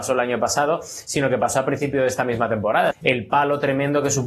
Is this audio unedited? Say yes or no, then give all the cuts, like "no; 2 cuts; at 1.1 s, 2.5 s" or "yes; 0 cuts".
no; 1 cut; at 2.9 s